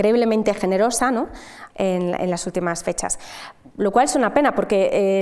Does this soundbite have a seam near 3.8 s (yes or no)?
no